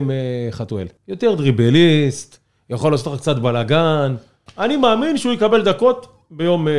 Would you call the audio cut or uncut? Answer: cut